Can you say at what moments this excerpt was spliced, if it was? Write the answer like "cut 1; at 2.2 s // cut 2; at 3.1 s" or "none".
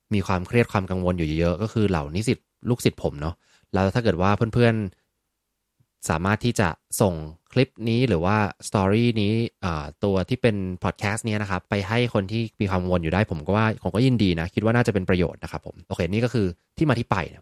cut 1; at 11.7 s // cut 2; at 15.8 s